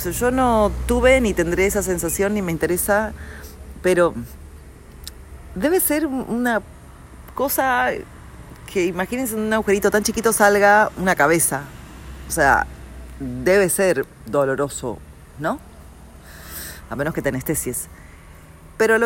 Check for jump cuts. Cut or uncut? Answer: uncut